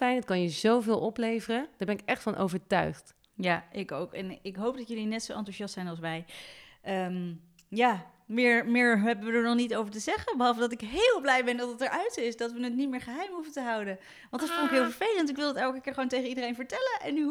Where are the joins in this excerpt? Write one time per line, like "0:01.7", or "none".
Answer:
none